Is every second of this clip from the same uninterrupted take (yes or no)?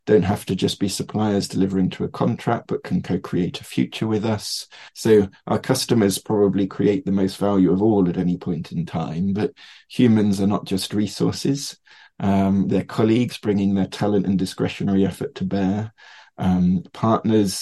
no